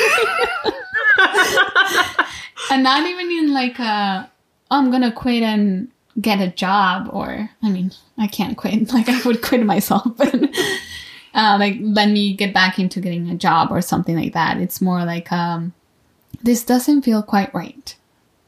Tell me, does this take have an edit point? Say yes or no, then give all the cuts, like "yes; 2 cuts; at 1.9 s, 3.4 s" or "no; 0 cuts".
no; 0 cuts